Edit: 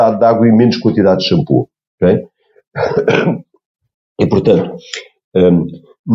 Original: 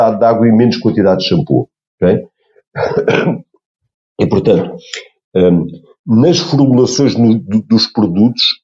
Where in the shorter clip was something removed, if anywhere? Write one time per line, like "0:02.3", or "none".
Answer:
none